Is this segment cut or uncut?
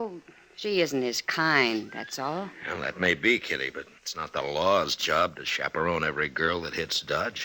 cut